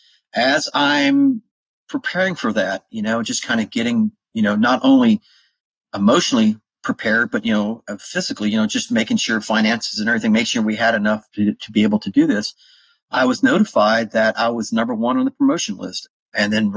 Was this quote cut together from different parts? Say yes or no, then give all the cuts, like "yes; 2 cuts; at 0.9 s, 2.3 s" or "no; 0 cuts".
no; 0 cuts